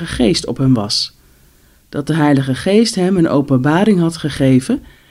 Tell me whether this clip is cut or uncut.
uncut